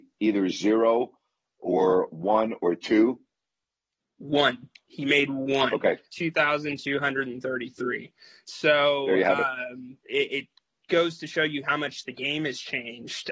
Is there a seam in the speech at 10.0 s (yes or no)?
no